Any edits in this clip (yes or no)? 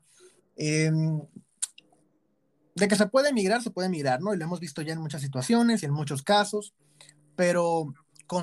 no